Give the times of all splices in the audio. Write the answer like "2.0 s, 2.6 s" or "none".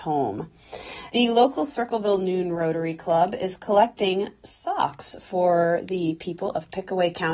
1.1 s